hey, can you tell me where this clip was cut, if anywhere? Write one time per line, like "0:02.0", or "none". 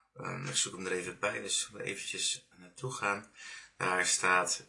0:02.5